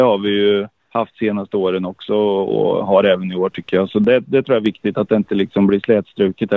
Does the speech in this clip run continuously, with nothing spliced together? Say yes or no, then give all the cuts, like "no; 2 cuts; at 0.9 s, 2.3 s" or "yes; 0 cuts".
yes; 0 cuts